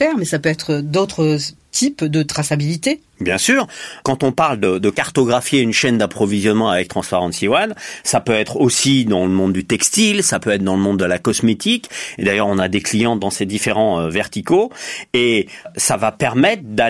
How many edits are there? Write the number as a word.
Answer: one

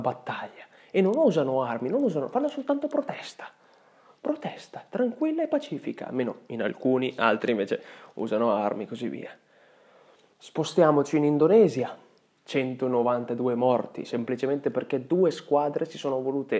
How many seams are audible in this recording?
zero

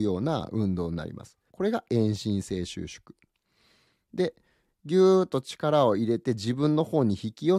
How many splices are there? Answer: one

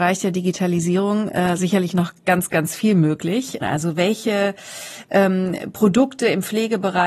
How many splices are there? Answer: one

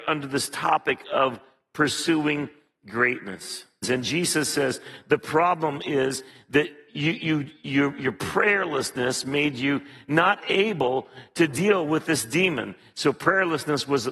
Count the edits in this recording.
one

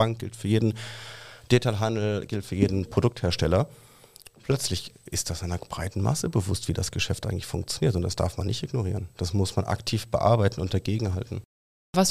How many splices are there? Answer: zero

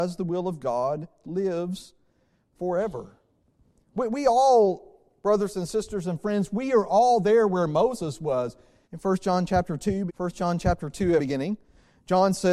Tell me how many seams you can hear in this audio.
three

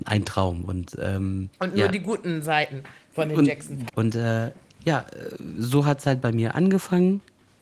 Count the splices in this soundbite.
two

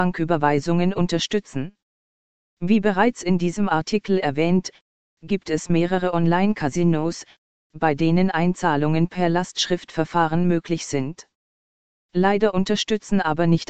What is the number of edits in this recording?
zero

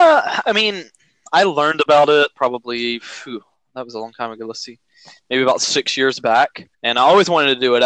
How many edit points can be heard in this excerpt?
one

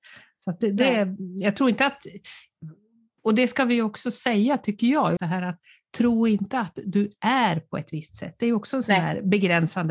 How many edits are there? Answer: one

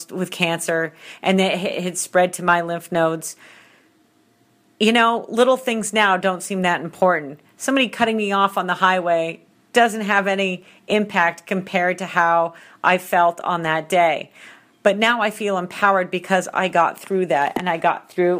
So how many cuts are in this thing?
zero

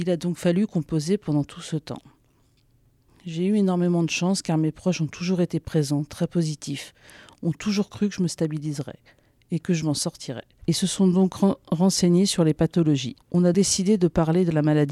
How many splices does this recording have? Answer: one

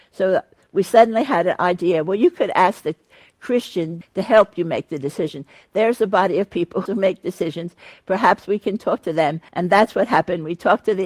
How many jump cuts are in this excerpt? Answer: three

